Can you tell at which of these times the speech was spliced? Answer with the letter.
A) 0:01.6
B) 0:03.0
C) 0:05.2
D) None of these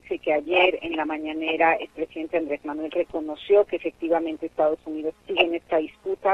C